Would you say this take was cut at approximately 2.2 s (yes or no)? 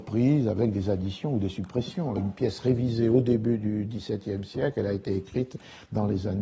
yes